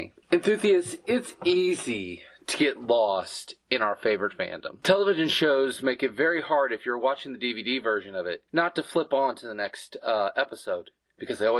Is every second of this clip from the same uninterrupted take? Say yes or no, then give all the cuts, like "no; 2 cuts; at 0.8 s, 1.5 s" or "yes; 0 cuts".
no; 1 cut; at 8.5 s